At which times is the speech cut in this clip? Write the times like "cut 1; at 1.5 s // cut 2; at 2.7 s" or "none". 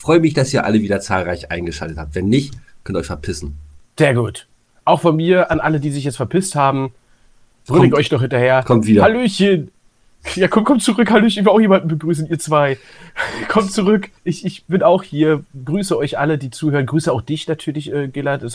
cut 1; at 14.2 s